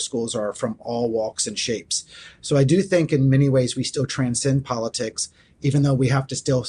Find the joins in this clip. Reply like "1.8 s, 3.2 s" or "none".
none